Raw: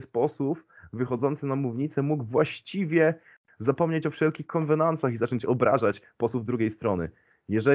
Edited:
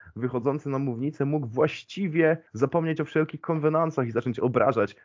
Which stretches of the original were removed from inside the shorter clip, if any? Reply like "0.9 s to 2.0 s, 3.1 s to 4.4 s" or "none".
3.2 s to 3.5 s